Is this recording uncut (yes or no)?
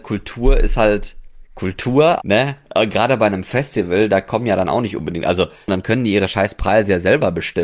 no